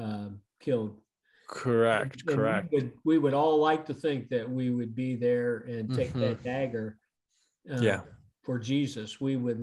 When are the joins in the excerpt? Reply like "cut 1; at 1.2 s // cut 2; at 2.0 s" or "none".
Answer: none

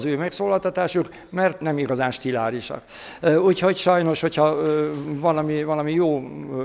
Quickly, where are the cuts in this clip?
none

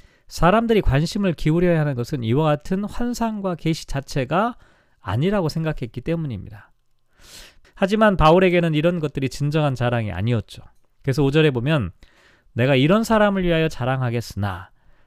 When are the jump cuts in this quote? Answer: cut 1; at 7.6 s

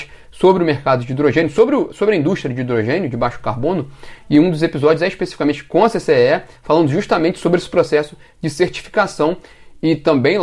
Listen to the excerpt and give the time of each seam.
none

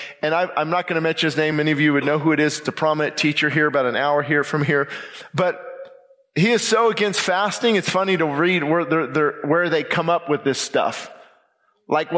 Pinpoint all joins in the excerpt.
none

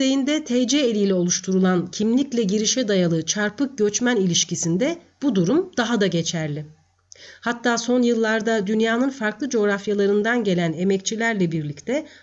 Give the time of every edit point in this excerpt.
none

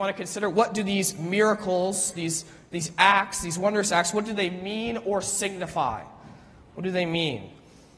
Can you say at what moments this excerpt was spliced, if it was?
none

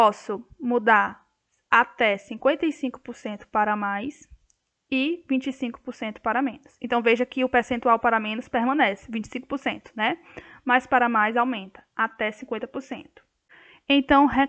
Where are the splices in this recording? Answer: none

